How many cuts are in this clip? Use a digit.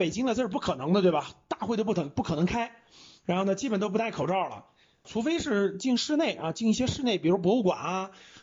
1